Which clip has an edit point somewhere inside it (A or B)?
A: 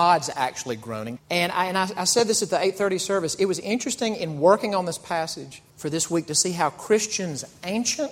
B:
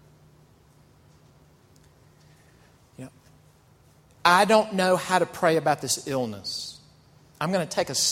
A